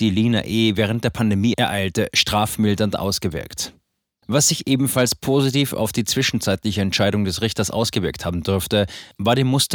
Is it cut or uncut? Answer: cut